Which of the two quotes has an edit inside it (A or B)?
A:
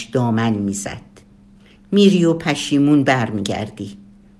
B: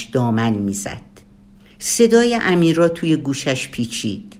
A